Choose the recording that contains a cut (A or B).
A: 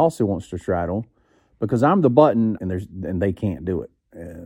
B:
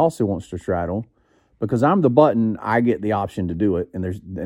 A